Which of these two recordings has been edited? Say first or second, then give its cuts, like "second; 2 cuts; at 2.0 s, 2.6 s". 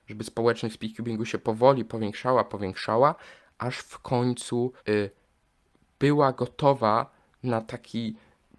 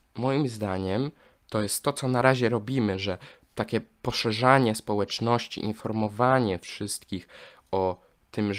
first; 2 cuts; at 2.5 s, 4.8 s